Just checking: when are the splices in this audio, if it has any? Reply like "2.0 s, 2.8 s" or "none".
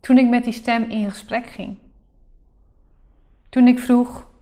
none